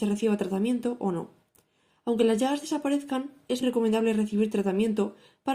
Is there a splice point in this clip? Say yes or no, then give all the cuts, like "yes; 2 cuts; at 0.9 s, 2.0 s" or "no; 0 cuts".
yes; 1 cut; at 3.6 s